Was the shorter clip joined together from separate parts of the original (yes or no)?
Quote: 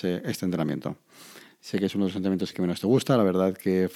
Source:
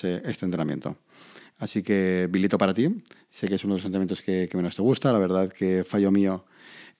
yes